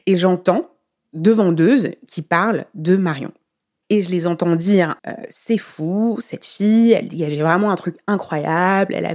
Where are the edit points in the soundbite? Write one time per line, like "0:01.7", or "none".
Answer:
0:03.8
0:05.0